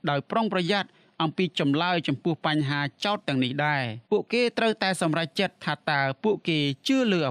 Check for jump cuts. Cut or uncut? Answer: cut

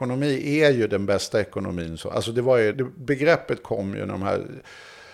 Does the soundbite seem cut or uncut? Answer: cut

